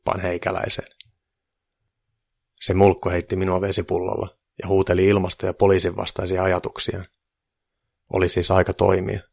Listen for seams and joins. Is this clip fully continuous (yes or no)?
no